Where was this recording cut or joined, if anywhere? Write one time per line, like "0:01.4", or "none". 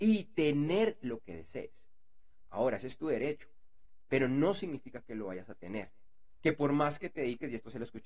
0:06.4

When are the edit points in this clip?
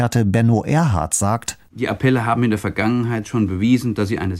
none

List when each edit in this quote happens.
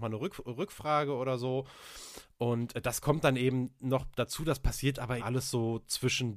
0:05.2

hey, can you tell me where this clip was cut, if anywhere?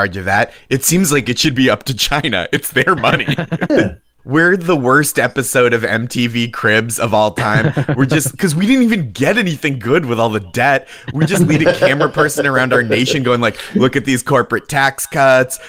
0:03.7

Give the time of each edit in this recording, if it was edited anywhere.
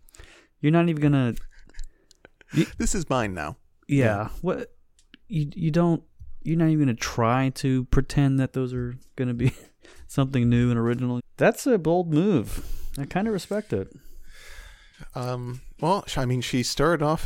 0:11.2

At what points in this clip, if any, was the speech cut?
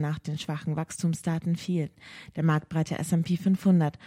0:02.3

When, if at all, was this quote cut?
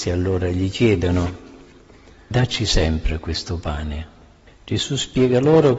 0:02.3
0:04.5

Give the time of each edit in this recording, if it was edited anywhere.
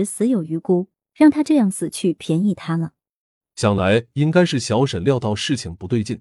0:03.5

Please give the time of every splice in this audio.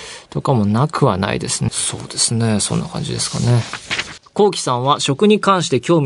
0:01.7
0:04.2

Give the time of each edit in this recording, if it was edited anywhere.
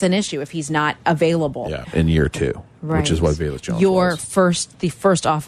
0:01.8

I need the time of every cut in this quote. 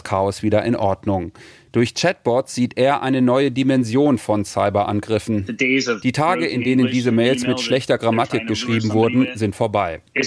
none

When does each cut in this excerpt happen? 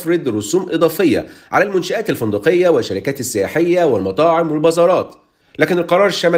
0:05.4

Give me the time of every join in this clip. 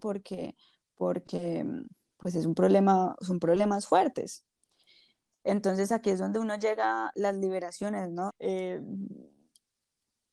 0:08.3

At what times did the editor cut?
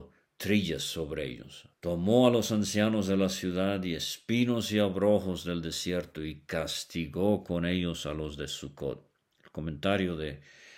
0:01.7

